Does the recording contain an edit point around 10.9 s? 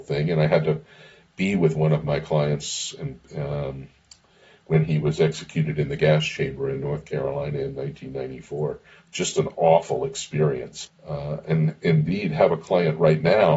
yes; 1 cut; at 10.9 s

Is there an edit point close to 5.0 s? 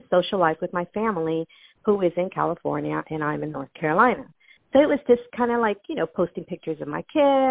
no; 0 cuts

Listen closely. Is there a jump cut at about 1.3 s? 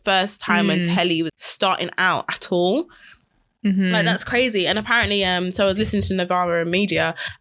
yes; 1 cut; at 1.3 s

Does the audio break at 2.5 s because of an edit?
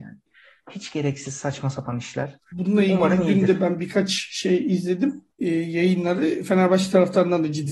yes; 2 cuts; at 2.5 s, 5.3 s

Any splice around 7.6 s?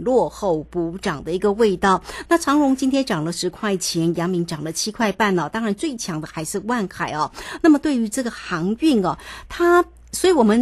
no; 0 cuts

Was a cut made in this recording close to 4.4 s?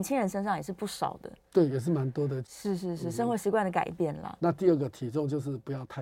yes; 2 cuts; at 2.4 s, 4.4 s

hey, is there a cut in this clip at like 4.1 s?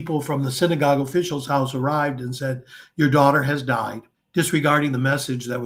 yes; 1 cut; at 4.1 s

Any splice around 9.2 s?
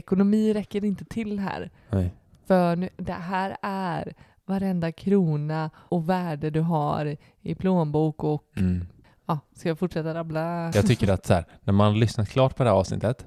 no; 2 cuts; at 5.9 s, 10.7 s

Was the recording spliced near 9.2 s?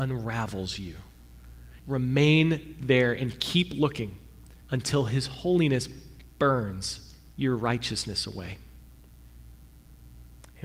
no; 3 cuts; at 1.8 s, 4.6 s, 7.4 s

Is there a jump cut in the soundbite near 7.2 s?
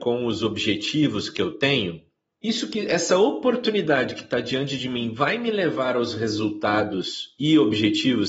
no; 1 cut; at 2.3 s

